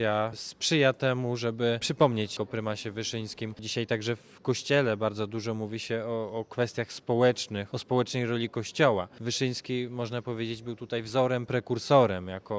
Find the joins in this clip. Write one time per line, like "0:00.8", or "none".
none